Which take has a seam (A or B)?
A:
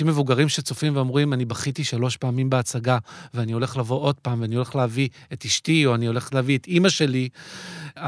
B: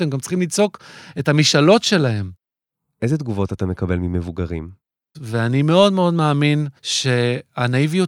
B